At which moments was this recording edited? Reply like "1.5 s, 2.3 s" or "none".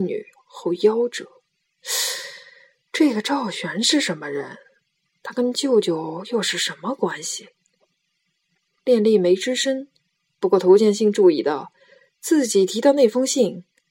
none